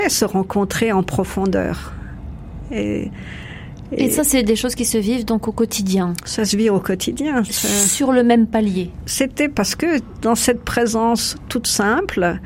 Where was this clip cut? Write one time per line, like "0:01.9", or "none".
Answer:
0:09.0